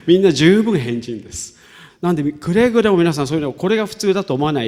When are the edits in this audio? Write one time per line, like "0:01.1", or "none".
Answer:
0:01.9